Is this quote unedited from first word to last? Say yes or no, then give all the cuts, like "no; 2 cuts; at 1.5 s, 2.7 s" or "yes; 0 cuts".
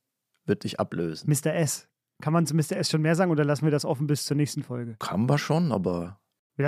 yes; 0 cuts